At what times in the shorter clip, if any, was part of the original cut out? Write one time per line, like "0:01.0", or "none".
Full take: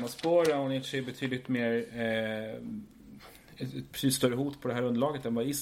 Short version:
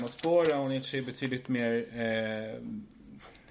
none